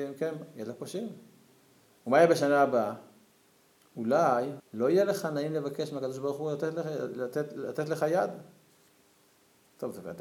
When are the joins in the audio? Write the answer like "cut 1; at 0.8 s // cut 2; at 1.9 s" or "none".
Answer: cut 1; at 4.6 s